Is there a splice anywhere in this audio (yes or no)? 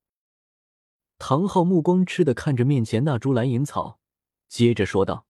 yes